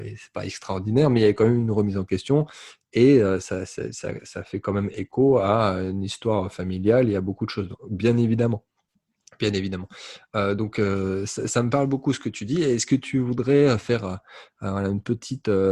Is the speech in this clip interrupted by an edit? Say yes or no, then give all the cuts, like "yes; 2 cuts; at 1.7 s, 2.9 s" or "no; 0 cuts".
no; 0 cuts